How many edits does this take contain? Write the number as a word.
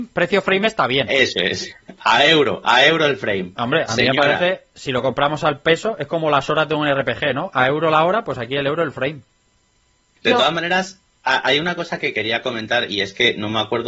zero